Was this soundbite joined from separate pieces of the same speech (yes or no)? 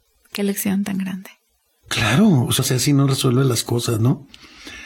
yes